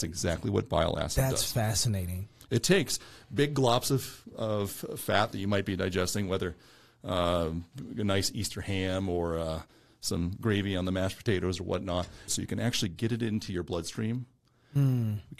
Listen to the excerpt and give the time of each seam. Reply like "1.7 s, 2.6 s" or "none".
12.3 s